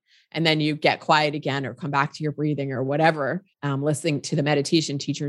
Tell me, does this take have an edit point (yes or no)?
yes